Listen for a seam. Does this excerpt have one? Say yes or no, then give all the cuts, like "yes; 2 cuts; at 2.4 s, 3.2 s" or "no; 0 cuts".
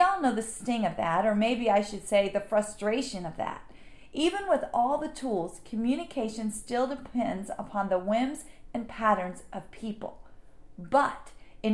no; 0 cuts